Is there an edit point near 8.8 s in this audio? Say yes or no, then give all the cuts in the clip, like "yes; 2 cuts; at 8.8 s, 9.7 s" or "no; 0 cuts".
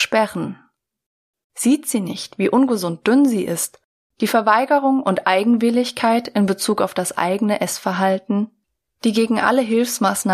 no; 2 cuts; at 1.4 s, 4.1 s